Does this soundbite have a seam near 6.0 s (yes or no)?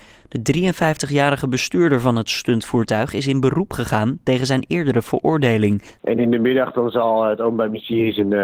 yes